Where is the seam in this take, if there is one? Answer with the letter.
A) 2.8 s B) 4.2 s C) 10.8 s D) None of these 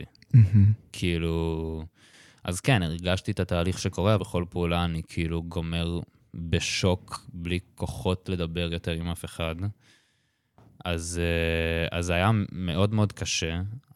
B